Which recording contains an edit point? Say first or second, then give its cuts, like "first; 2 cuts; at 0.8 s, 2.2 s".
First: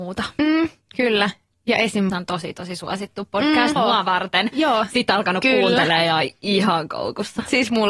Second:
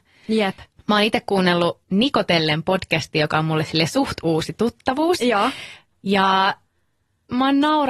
first; 2 cuts; at 2.1 s, 3.8 s